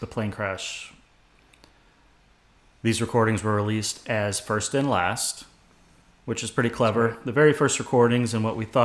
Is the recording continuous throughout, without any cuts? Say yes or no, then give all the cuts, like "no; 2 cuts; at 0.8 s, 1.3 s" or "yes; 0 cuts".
yes; 0 cuts